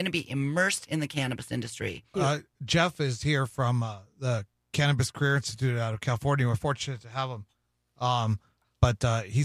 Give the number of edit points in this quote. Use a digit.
1